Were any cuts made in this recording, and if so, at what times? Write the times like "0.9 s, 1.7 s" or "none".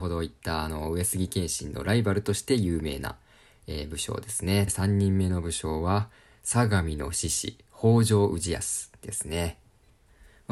4.7 s